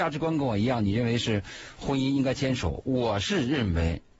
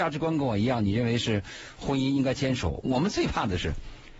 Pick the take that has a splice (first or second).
second